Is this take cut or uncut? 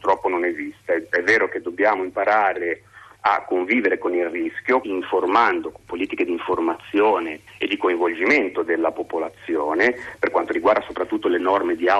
cut